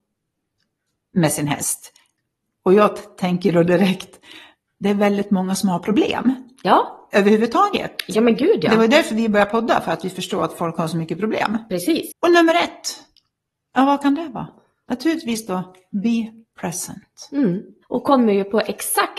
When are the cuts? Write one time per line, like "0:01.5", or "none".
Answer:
0:12.1
0:17.8